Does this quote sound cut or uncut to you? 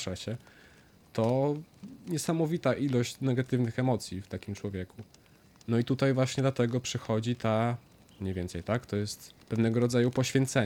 cut